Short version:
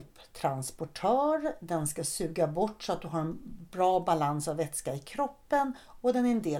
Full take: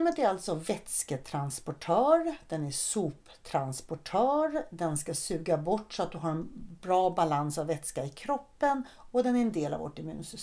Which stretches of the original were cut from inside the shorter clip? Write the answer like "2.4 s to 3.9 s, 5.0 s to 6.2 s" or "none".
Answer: none